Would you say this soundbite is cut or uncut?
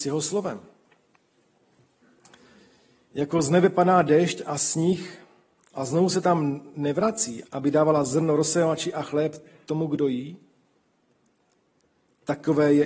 cut